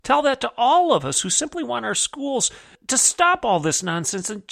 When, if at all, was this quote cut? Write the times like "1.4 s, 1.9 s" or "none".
2.7 s